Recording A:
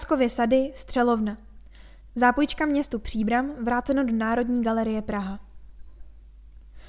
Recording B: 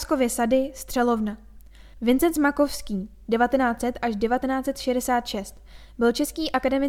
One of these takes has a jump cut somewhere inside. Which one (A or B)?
B